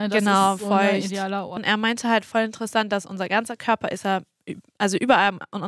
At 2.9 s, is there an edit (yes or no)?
no